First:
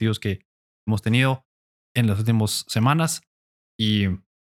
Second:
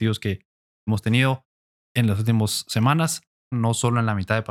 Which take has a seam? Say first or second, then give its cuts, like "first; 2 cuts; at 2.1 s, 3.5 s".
second; 1 cut; at 3.5 s